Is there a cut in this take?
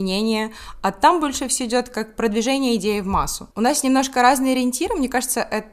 yes; 1 cut; at 3.5 s

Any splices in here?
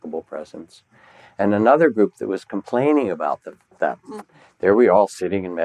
yes; 1 cut; at 4.2 s

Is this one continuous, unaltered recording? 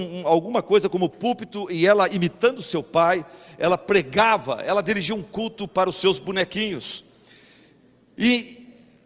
yes; 0 cuts

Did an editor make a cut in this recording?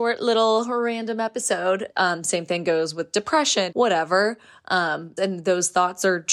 yes; 3 cuts; at 1.9 s, 3.7 s, 5.2 s

